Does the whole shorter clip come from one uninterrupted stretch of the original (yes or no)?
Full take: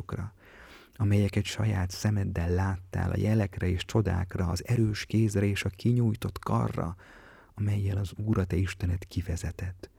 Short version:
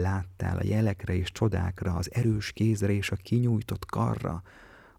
yes